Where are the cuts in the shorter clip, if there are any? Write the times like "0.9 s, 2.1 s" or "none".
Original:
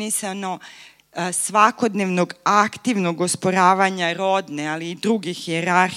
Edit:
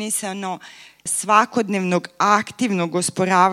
1.1 s